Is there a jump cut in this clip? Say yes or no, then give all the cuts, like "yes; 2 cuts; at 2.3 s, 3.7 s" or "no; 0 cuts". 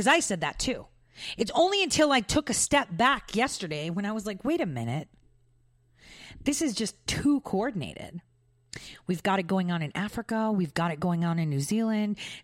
no; 0 cuts